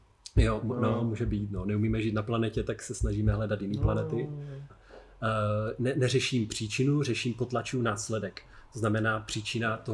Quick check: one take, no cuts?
no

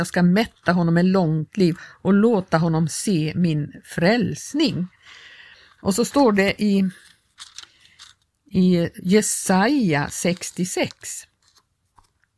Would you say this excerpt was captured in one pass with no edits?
yes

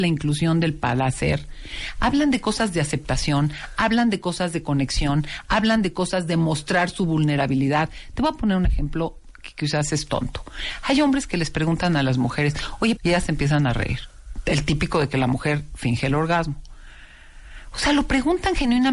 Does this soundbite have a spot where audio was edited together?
yes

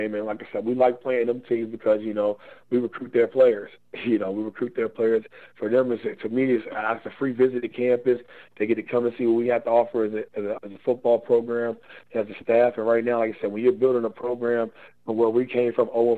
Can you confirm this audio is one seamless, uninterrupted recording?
no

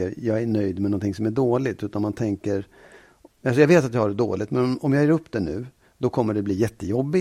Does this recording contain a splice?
yes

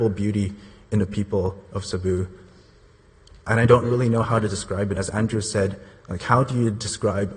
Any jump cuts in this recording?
no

